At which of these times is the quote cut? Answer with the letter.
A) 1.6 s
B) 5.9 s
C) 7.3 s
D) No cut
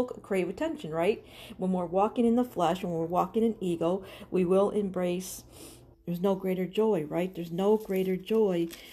B